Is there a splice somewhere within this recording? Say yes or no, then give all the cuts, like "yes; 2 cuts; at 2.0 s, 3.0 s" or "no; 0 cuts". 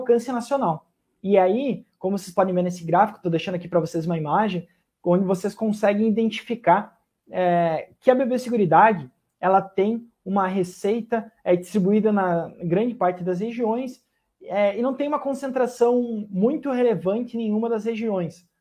no; 0 cuts